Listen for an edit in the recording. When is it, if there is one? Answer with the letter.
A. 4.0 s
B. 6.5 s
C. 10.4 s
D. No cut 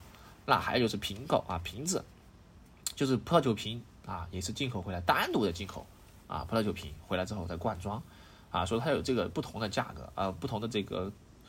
D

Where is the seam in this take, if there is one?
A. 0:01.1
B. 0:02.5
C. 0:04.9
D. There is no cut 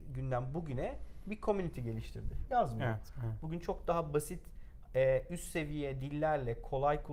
B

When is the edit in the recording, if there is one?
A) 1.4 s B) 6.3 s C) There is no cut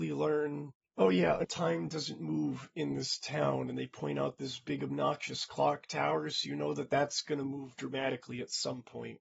A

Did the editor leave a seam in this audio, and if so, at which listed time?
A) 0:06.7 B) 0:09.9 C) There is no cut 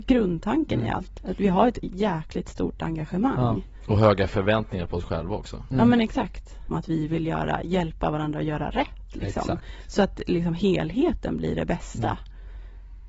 A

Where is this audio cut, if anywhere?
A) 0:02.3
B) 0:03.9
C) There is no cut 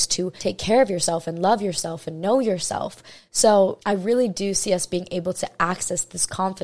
C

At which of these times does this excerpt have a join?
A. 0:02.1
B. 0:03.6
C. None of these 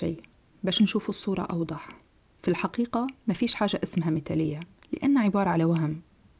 C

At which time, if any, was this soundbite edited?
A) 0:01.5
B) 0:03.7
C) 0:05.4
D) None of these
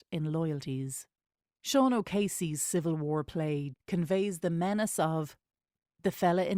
B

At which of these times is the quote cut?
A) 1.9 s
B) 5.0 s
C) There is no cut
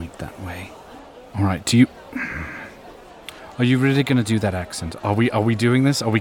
B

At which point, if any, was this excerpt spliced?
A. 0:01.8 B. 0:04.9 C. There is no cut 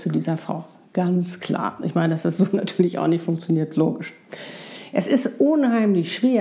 C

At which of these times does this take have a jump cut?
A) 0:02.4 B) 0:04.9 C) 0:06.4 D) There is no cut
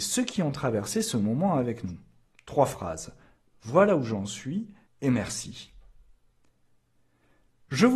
B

